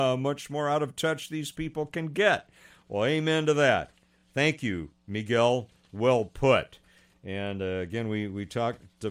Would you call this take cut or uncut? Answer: uncut